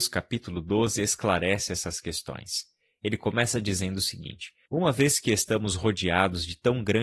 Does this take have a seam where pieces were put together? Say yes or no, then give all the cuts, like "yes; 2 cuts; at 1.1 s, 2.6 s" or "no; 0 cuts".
yes; 1 cut; at 4.7 s